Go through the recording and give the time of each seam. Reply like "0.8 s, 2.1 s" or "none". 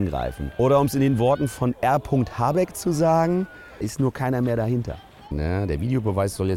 3.8 s, 5.3 s